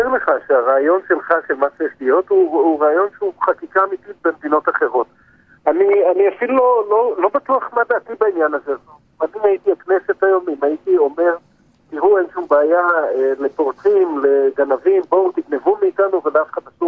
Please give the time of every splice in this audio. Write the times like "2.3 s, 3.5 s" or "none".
none

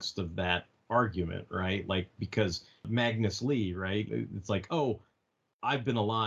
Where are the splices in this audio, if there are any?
4.1 s

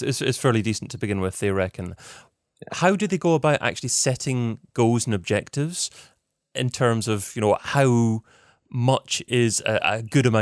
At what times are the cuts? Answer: none

